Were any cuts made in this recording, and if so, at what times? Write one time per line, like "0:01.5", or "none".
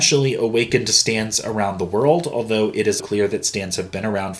0:03.0

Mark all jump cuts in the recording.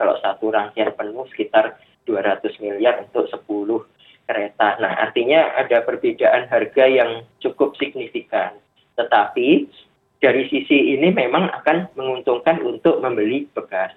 none

